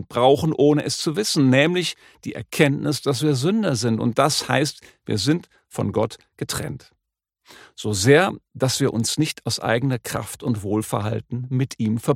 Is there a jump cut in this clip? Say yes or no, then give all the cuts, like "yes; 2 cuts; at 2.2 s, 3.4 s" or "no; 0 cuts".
no; 0 cuts